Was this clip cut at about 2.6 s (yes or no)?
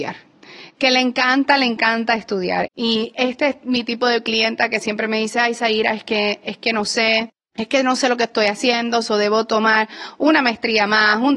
yes